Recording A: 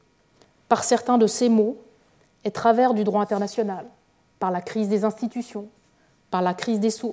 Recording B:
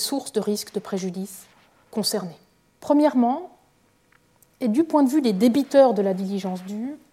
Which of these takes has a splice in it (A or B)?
B